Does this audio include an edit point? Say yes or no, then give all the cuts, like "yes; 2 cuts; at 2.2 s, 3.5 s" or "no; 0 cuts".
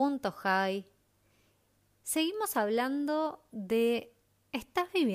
no; 0 cuts